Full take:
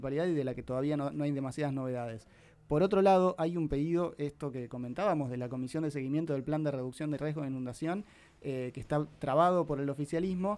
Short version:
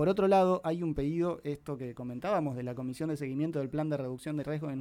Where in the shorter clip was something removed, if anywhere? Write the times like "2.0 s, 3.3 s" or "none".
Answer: none

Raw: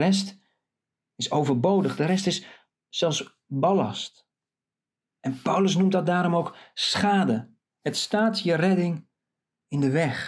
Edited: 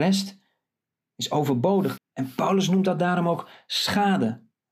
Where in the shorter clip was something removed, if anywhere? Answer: 2.0 s

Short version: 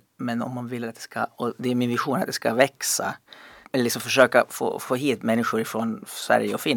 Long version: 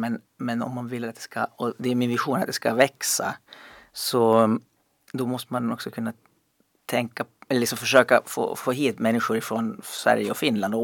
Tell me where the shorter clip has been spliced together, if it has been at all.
3.6 s

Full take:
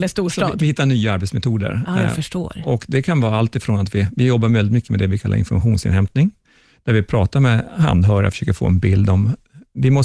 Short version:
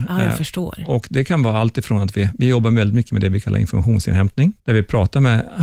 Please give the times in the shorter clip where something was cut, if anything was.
4.6 s

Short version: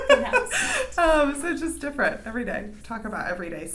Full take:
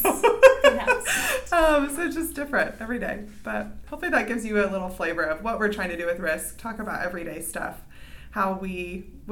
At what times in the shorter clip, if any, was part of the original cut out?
2.8 s

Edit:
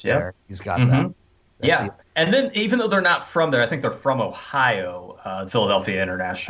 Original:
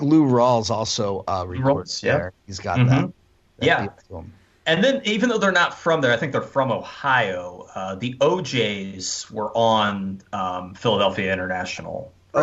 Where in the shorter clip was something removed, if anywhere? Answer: 2.0 s, 5.5 s

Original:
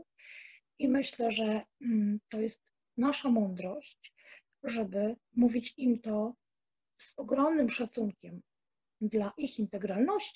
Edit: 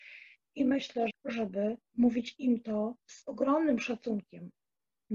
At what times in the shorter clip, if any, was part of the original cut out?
1.1 s, 3.0 s

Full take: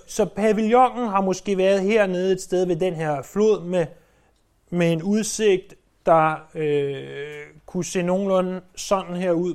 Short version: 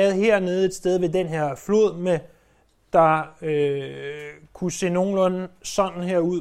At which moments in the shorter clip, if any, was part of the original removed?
2.8 s

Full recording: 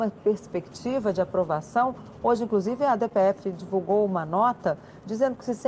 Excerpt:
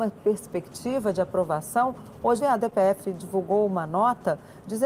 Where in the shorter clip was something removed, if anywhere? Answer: 2.4 s

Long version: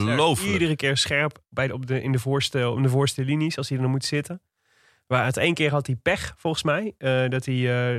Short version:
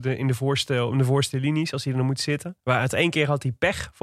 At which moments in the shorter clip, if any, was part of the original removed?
2.6 s

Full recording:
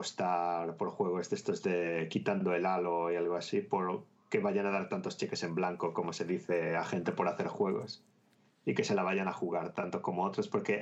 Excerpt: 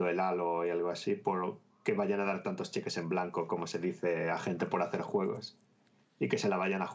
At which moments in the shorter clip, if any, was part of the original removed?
none

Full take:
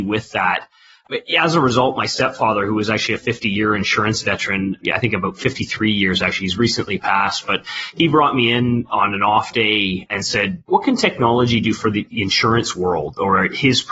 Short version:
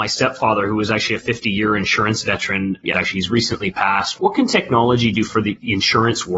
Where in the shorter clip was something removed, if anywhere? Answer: 2.9 s, 4.2 s

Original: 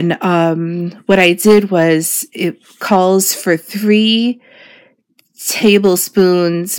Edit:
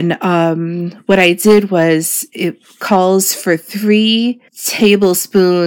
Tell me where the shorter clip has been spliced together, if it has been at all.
4.5 s

